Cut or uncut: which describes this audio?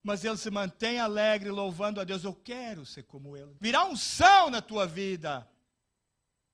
cut